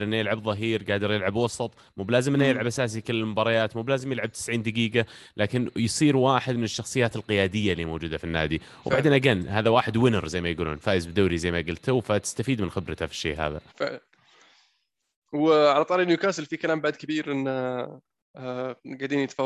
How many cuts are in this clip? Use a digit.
1